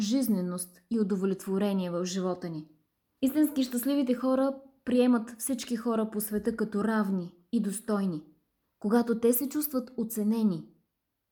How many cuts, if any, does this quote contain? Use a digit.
2